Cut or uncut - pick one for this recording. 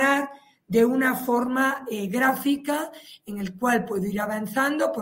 uncut